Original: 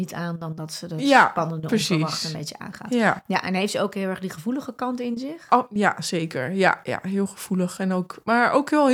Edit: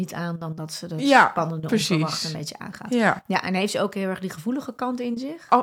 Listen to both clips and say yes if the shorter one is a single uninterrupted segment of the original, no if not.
yes